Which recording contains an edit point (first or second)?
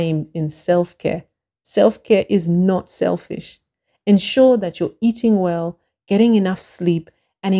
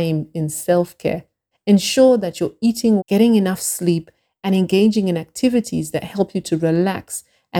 second